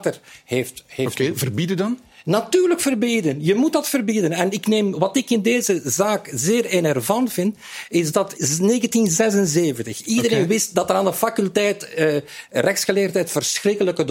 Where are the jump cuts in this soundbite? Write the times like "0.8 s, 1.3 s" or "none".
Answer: 8.3 s